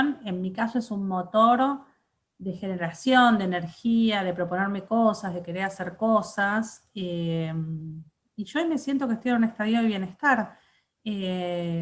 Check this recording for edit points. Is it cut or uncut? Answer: uncut